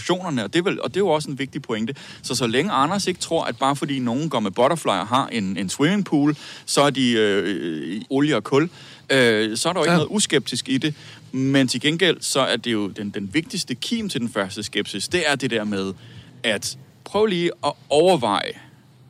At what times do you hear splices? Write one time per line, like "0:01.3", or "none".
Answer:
0:08.0